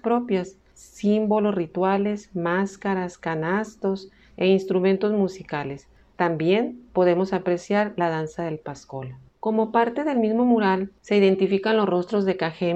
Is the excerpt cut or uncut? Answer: cut